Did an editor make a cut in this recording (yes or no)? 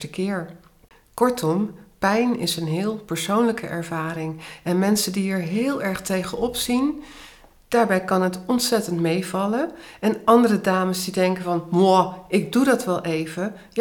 no